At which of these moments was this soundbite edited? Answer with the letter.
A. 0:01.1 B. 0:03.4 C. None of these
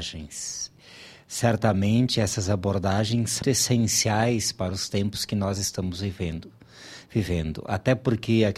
B